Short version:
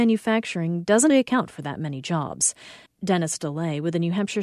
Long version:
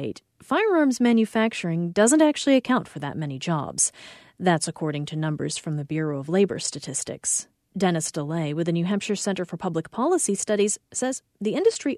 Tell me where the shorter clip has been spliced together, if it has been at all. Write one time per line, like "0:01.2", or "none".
0:01.1
0:02.9